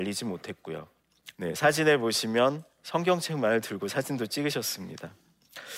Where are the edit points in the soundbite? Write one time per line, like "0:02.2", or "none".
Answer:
0:01.3